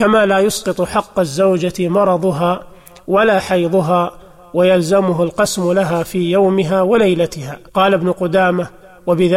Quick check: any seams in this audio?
yes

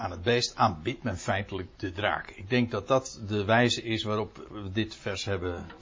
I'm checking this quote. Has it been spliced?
yes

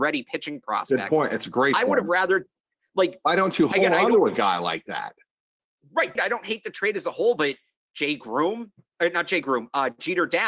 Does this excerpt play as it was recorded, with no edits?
no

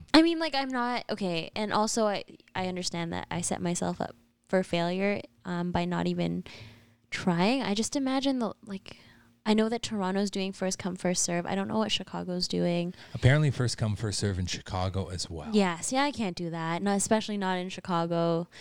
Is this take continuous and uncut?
yes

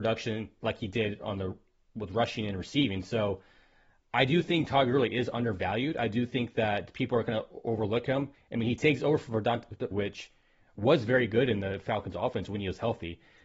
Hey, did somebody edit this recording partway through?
yes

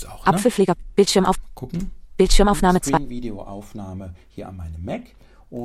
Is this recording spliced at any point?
no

